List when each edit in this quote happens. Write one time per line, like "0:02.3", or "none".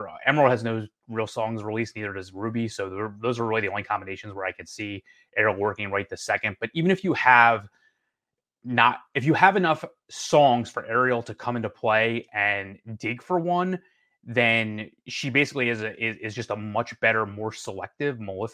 none